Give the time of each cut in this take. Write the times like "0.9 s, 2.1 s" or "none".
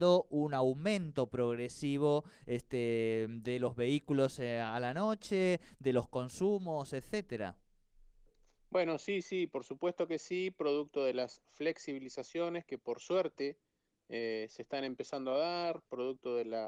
none